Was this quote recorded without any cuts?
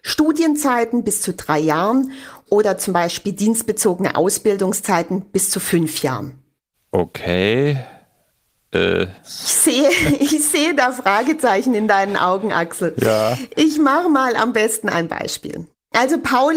yes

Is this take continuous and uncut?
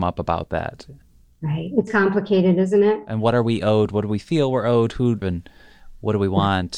no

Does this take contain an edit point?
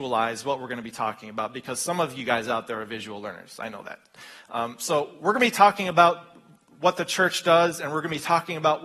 no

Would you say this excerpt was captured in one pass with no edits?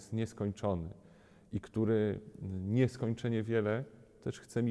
yes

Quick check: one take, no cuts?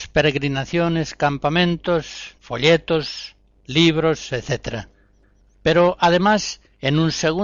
no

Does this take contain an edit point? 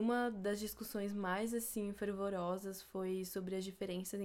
no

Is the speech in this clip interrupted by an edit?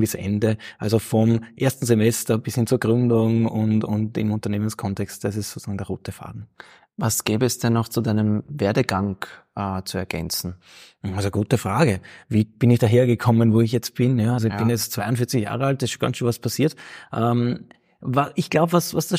yes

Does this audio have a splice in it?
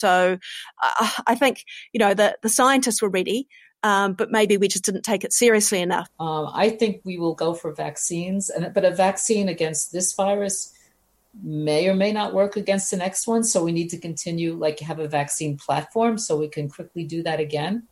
yes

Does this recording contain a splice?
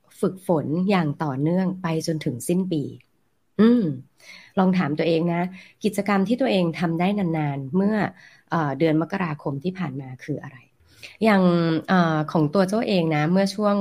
no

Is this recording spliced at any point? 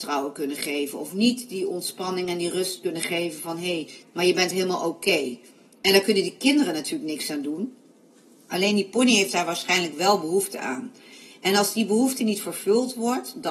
yes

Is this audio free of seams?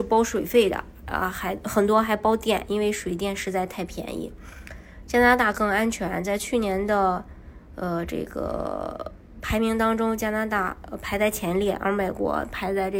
yes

